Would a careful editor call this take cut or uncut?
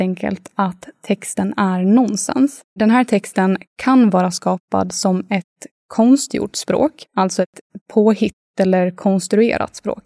cut